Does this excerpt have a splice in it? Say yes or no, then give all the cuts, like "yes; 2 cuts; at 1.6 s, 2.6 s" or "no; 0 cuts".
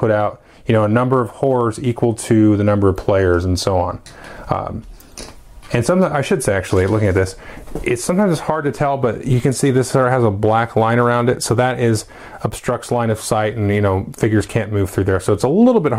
no; 0 cuts